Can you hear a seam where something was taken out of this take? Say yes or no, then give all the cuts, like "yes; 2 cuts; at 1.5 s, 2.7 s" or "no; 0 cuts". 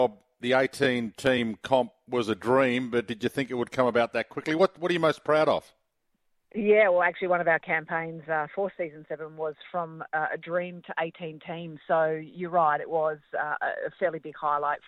no; 0 cuts